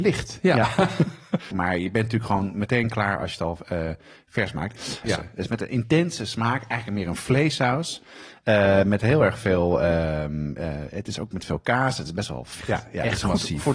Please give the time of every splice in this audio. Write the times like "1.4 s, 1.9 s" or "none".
1.5 s, 5.0 s, 12.6 s